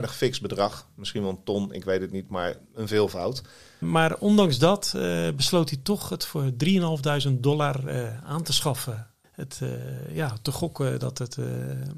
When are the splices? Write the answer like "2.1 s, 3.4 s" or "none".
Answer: 3.8 s, 9.2 s